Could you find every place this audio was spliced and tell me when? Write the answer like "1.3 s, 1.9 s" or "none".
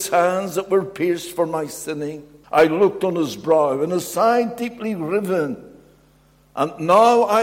2.4 s